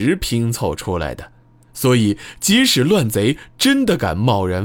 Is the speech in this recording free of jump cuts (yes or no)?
yes